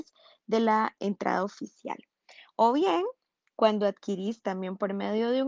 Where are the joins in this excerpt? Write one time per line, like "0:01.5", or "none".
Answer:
none